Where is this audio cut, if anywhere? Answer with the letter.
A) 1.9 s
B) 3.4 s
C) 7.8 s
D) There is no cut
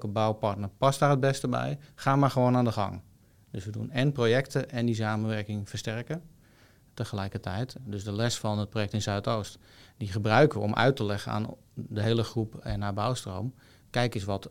C